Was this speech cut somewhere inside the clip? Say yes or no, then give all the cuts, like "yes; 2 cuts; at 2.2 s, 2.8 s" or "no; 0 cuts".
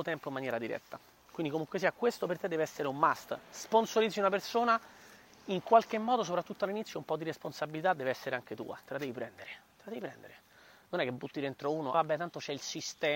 yes; 1 cut; at 11.9 s